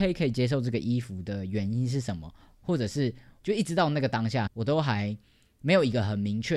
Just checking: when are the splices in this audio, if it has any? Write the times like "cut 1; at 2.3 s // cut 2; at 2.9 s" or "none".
cut 1; at 3.4 s // cut 2; at 4.5 s